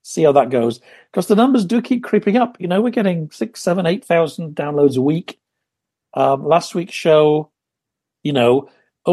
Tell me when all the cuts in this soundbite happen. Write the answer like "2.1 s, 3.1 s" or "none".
none